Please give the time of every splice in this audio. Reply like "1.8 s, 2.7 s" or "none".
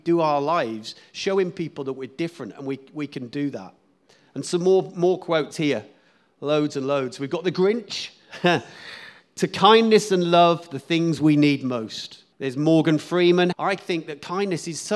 12.3 s, 13.5 s